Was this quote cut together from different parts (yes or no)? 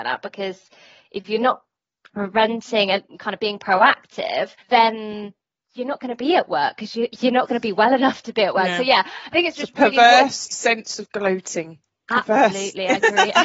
yes